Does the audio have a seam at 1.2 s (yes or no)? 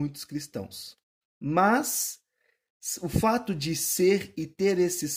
yes